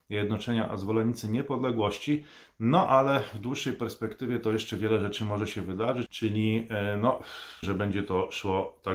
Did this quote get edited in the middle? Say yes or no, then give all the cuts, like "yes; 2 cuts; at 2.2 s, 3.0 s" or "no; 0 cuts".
yes; 2 cuts; at 6.1 s, 7.6 s